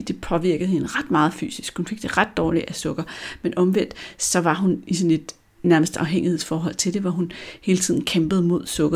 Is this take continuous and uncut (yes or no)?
yes